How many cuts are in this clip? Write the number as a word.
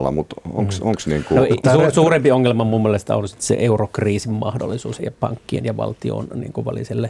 one